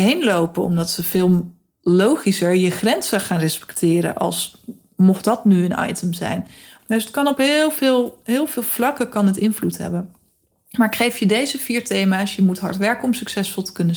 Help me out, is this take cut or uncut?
uncut